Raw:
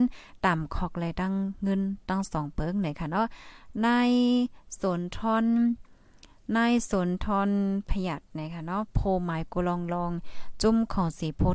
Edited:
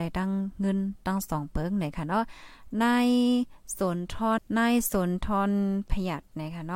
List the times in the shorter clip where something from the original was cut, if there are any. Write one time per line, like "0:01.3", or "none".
0:04.4